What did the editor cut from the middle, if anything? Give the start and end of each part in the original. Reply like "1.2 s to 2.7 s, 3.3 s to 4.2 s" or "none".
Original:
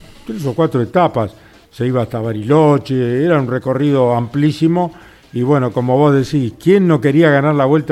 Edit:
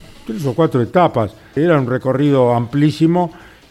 1.6 s to 3.2 s